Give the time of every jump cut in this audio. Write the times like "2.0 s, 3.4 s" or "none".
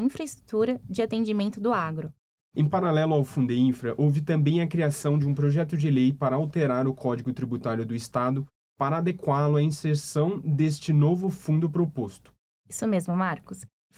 2.4 s